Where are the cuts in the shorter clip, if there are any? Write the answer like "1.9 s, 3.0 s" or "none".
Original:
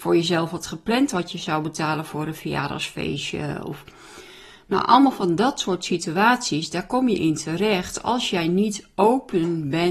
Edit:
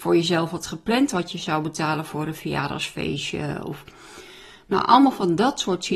none